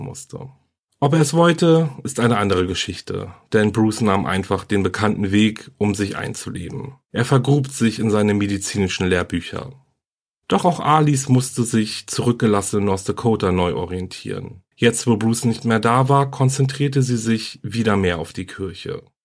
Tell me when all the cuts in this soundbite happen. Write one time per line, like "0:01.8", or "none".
none